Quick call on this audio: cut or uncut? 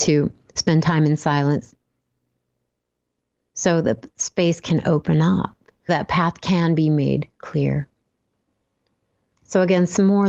cut